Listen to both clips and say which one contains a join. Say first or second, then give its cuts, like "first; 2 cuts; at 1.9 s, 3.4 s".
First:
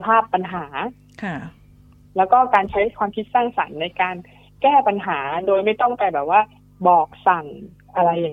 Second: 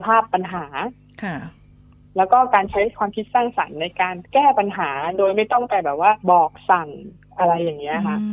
second; 2 cuts; at 4.2 s, 6.2 s